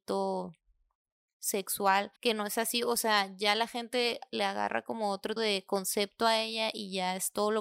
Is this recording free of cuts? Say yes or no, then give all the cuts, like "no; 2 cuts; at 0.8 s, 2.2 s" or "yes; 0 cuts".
no; 2 cuts; at 2.2 s, 5.4 s